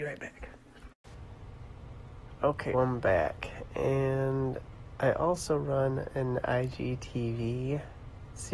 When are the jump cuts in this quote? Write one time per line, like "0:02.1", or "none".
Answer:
0:02.7